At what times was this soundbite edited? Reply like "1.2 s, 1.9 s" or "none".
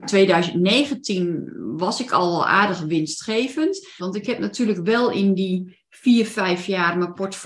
4.0 s